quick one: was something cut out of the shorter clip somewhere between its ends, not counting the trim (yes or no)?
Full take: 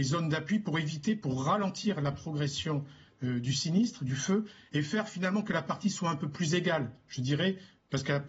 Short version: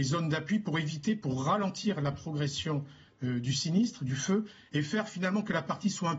no